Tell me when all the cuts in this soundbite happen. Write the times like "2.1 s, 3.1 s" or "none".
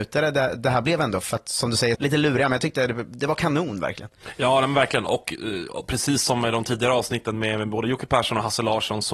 1.9 s